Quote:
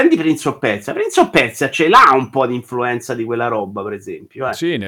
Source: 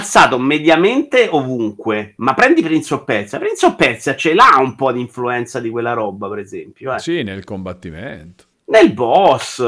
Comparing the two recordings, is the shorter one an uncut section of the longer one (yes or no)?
yes